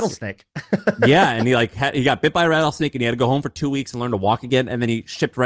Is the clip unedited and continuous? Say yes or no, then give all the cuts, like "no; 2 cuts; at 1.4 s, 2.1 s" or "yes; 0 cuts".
yes; 0 cuts